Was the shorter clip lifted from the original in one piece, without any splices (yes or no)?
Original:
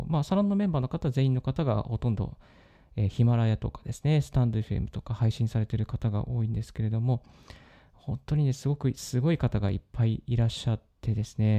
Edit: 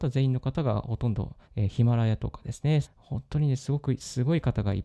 no